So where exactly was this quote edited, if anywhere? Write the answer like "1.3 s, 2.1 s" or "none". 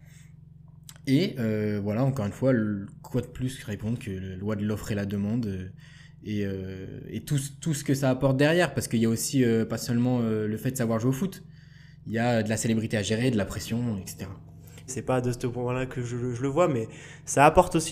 14.9 s